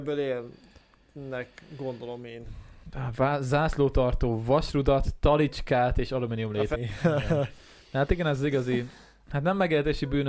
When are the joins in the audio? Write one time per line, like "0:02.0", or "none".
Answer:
0:06.7